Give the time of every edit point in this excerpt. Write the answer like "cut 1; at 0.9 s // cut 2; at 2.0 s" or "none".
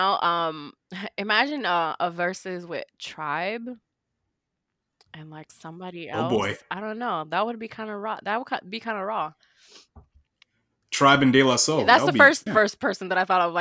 cut 1; at 12.5 s

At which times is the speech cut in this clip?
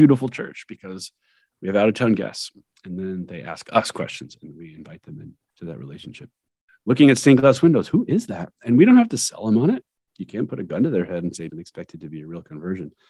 cut 1; at 6.7 s // cut 2; at 10.1 s // cut 3; at 11.5 s

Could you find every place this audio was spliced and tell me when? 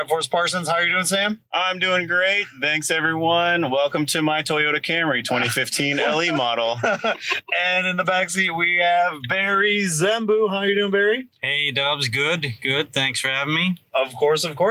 none

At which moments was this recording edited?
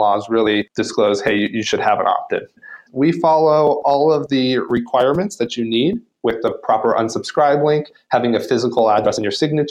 cut 1; at 2.9 s

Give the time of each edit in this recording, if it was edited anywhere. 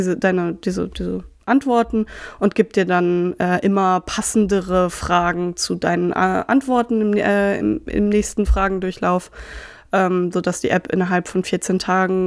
none

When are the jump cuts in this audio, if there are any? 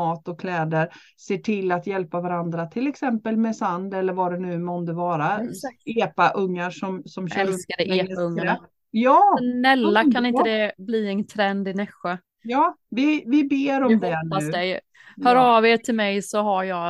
none

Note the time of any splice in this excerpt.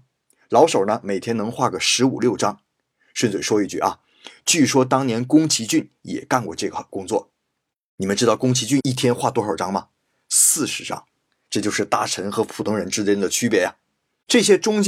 none

